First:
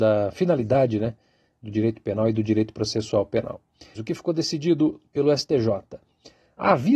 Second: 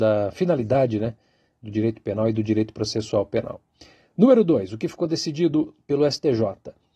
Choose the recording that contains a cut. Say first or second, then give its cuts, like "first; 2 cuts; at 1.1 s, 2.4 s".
first; 1 cut; at 4.0 s